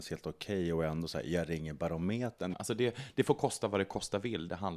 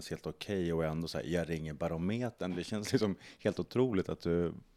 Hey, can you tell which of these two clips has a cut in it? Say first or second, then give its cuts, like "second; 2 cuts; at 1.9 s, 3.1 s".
first; 1 cut; at 2.5 s